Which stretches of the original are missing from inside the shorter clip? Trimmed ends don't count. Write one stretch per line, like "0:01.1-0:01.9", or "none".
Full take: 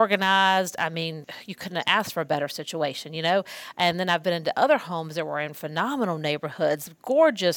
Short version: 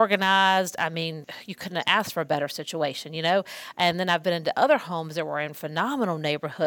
none